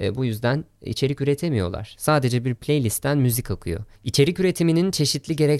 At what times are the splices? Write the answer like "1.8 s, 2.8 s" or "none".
3.9 s